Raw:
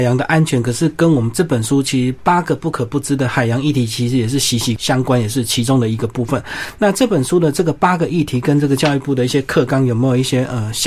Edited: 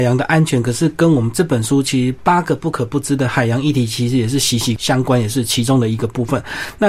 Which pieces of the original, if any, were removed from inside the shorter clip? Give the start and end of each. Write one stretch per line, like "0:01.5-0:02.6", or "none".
none